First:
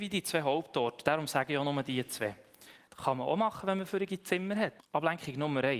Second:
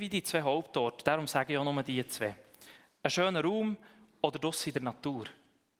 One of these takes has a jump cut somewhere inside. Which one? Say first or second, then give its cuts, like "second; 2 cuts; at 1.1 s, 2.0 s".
first; 2 cuts; at 2.9 s, 4.8 s